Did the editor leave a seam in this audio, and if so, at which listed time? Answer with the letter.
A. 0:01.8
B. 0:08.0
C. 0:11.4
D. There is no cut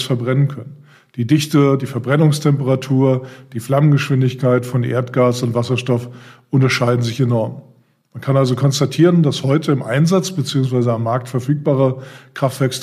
D